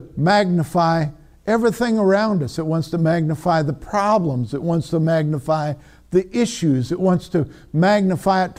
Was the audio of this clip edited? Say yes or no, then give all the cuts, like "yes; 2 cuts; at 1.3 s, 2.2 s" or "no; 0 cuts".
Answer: no; 0 cuts